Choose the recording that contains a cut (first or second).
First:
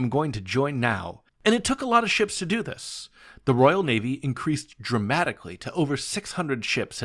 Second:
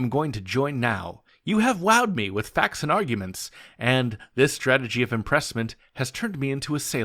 first